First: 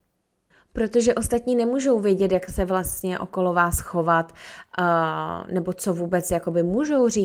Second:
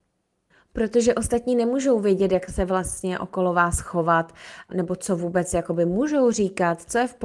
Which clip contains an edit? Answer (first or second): second